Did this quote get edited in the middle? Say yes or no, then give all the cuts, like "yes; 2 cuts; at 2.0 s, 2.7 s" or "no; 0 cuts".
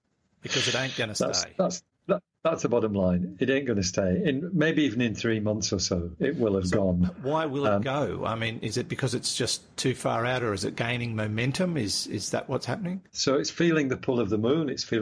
yes; 1 cut; at 13.1 s